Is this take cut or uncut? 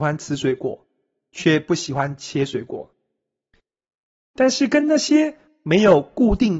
uncut